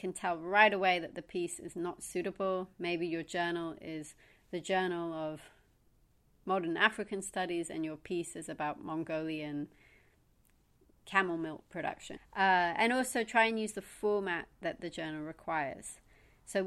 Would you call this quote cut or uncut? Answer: cut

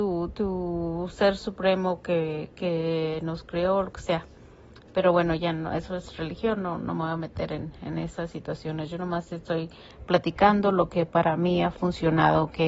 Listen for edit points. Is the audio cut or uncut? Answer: uncut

